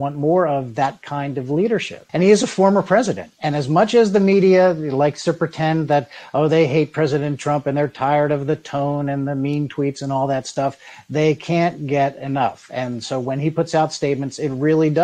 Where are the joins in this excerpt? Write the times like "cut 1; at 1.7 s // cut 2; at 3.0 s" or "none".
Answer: cut 1; at 2.1 s